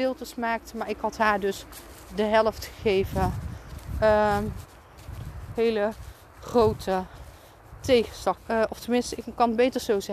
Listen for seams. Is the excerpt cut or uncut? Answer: cut